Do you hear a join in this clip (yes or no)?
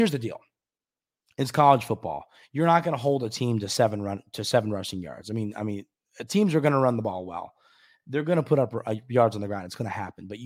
no